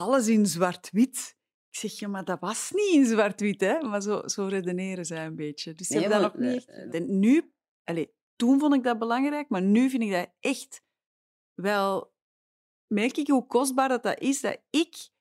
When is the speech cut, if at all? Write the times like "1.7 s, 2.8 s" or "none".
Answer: 6.9 s